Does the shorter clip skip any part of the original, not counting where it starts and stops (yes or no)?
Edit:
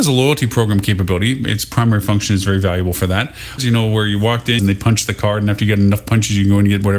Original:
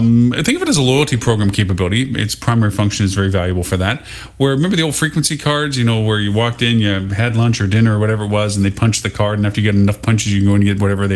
yes